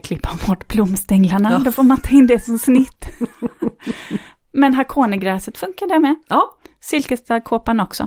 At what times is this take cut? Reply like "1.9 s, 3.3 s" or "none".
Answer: none